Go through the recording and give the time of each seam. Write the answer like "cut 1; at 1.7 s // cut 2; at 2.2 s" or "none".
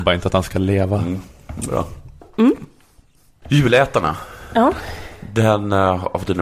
cut 1; at 2.2 s